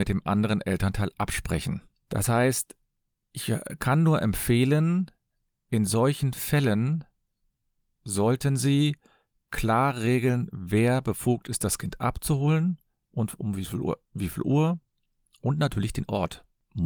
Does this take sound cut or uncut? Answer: cut